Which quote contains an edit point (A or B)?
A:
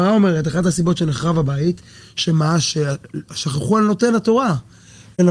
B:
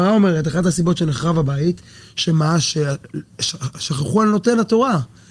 A